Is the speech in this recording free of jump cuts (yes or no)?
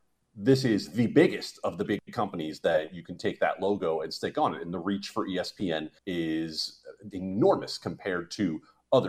no